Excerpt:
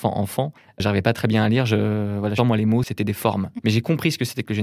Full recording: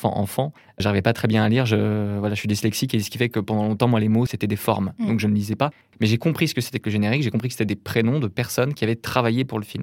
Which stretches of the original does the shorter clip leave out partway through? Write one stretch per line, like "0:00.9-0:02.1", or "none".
0:02.4-0:03.8
0:05.0-0:05.9